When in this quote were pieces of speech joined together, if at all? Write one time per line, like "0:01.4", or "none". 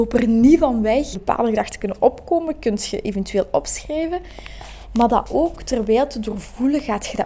0:01.1

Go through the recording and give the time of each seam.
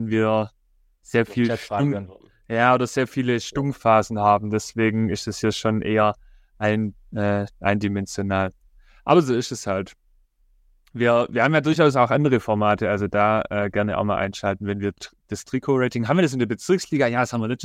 none

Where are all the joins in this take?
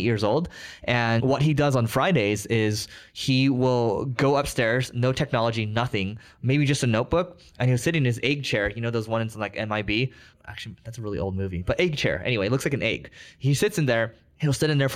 none

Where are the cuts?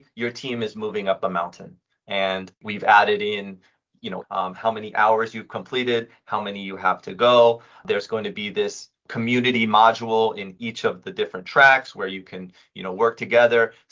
0:04.2

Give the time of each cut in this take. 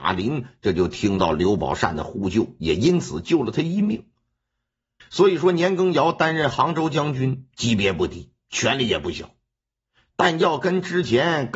0:05.0

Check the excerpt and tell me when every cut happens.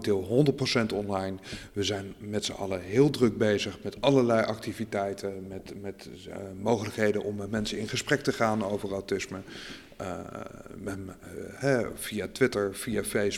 none

